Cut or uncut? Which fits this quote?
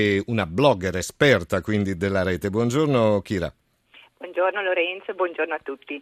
uncut